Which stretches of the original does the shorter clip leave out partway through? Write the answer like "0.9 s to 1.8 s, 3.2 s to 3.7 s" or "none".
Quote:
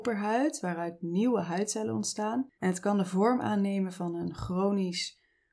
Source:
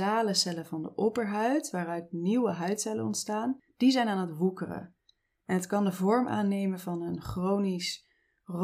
3.7 s to 5.4 s

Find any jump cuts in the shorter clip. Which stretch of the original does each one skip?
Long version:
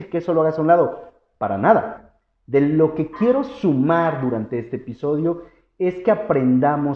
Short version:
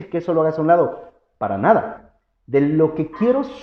none

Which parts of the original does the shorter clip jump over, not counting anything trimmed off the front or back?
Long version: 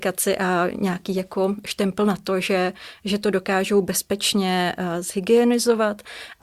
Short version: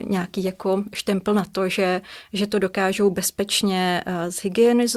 none

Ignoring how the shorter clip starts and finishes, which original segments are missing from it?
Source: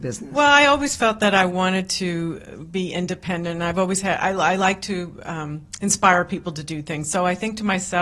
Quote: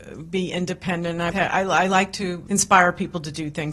3.7 s to 4.0 s, 5.2 s to 5.8 s

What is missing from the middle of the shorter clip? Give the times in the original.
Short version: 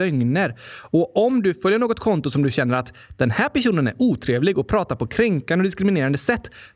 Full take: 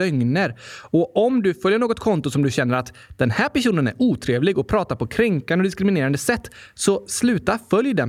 none

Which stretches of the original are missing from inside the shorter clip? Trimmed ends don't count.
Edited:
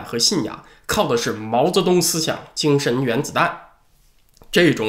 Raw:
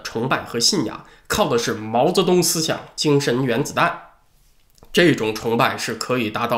none

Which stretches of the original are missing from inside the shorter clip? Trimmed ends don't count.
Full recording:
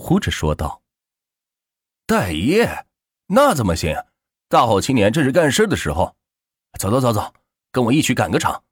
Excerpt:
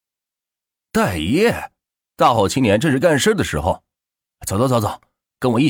3.2 s to 4.3 s

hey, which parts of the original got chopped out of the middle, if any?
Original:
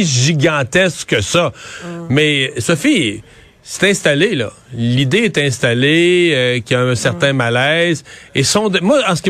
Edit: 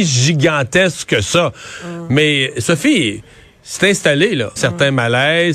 4.6 s to 7.0 s

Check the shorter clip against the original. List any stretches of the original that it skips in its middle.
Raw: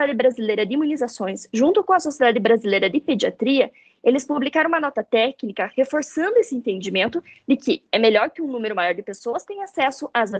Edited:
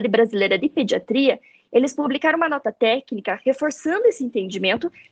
none

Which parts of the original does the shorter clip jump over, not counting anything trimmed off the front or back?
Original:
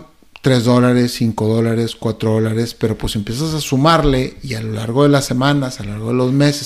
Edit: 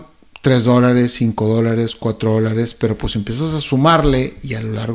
none

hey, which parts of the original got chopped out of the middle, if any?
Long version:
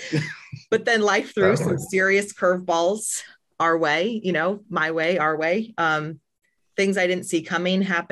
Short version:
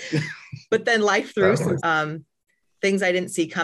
1.8 s to 5.7 s

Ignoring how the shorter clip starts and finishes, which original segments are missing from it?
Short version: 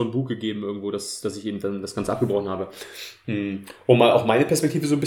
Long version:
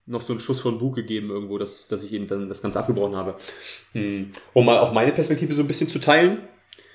none

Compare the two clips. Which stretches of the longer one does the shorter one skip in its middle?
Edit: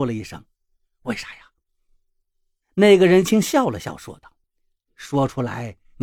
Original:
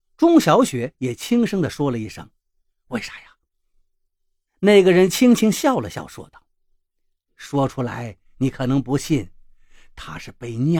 5.1 s to 5.4 s, 6.5 s to 6.8 s

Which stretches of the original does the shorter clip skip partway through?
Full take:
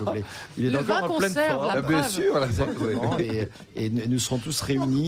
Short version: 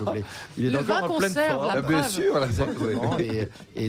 none

